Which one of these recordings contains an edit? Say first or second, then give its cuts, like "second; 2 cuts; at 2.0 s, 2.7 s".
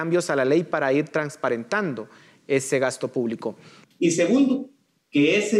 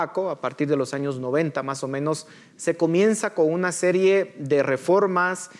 first; 1 cut; at 3.8 s